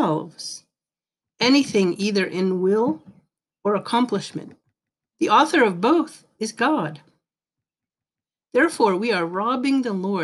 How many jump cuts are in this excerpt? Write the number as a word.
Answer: one